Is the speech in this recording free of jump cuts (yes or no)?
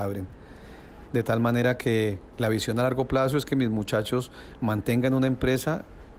no